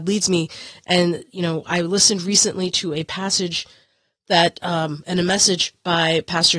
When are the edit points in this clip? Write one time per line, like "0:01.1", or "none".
none